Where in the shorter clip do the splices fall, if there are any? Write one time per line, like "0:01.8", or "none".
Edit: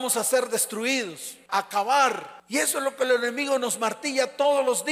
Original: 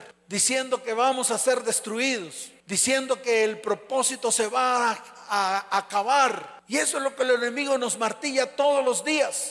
0:01.5